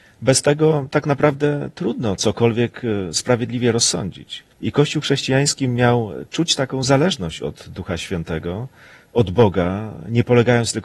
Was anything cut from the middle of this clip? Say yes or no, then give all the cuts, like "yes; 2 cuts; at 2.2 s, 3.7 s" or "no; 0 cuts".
yes; 1 cut; at 4.5 s